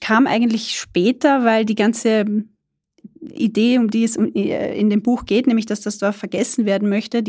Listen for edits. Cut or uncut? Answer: uncut